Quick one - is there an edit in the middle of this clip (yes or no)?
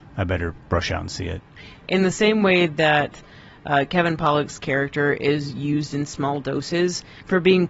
no